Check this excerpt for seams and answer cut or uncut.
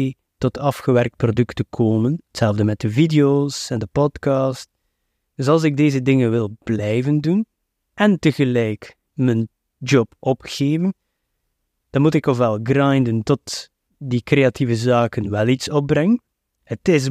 cut